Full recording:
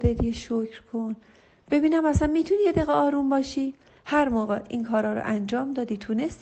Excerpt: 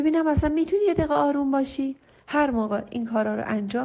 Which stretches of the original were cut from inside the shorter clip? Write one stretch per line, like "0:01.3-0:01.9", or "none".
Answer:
none